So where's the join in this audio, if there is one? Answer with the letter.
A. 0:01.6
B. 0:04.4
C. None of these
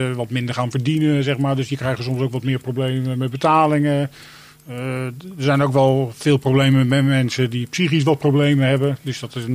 C